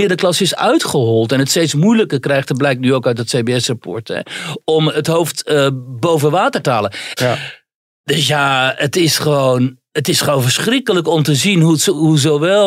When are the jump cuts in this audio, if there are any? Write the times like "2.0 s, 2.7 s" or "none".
7.2 s

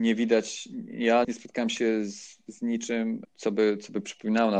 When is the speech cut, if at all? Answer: 1.2 s, 3.2 s

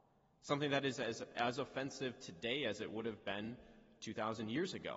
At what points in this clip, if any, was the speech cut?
none

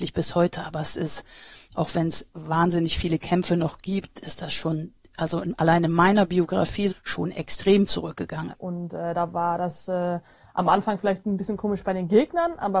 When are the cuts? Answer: 6.9 s, 8.5 s

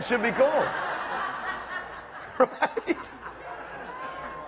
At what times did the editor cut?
none

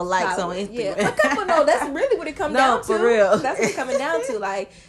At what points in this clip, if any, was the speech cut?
0.9 s, 3.4 s

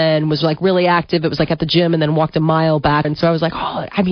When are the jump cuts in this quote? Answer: 3.0 s

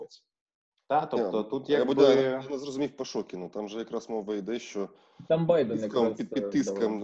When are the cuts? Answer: none

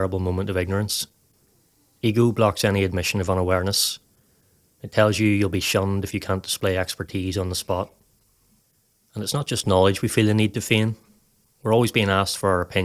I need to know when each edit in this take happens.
none

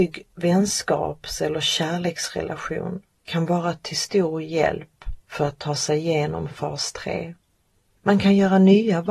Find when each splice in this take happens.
8.0 s

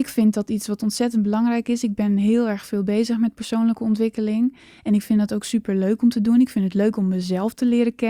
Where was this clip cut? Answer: none

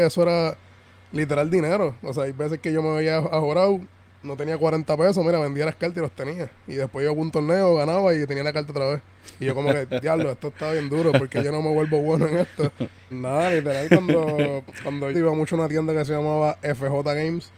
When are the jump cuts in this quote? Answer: 13.1 s, 15.1 s

